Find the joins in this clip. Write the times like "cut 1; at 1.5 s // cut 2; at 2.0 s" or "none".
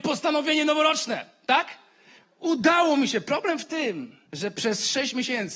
cut 1; at 4.3 s